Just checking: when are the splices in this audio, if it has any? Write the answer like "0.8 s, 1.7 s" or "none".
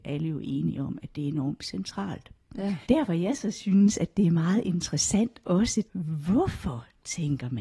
2.8 s, 5.9 s